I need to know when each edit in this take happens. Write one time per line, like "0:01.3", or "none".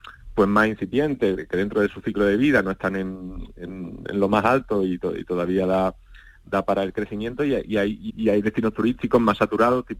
0:01.3
0:08.1